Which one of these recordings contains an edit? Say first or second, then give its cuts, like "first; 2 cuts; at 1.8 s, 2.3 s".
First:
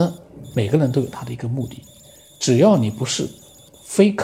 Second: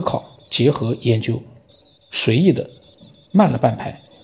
first; 1 cut; at 2.3 s